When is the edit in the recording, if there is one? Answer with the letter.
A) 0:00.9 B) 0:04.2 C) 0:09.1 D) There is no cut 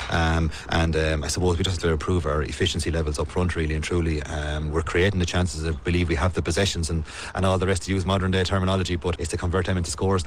C